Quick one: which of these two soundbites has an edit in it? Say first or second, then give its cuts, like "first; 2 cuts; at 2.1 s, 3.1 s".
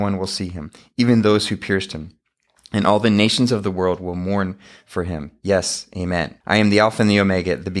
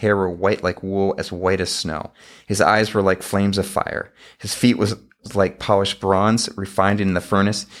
first; 1 cut; at 6.4 s